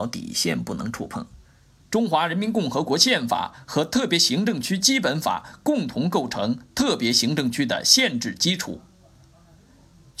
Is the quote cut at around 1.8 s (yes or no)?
yes